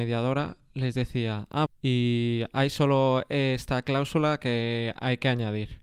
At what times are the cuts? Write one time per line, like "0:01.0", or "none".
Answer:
0:01.7